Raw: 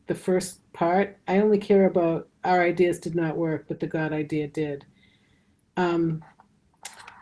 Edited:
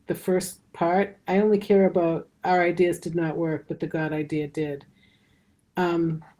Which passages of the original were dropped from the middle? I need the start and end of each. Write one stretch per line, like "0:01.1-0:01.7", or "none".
none